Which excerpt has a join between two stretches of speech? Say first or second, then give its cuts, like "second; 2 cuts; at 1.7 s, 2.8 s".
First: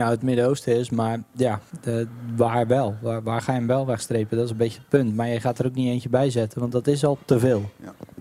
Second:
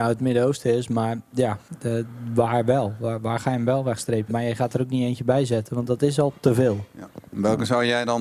second; 1 cut; at 4.3 s